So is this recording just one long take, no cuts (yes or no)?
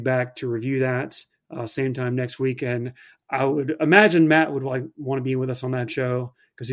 yes